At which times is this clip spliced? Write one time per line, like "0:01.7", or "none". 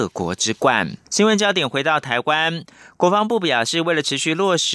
0:01.1